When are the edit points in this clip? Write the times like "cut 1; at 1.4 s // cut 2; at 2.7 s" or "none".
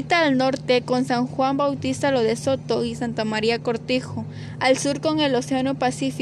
none